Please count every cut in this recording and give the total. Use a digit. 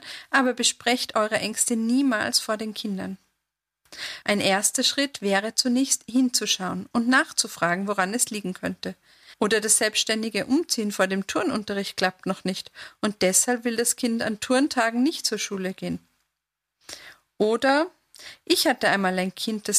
2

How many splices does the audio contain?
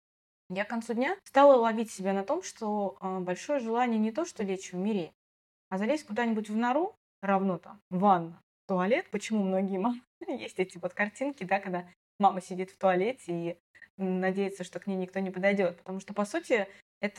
0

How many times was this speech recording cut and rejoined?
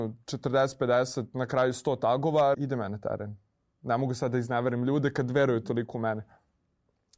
1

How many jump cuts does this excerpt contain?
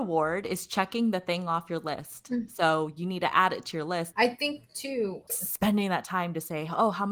2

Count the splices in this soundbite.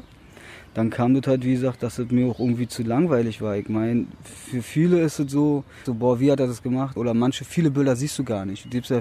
2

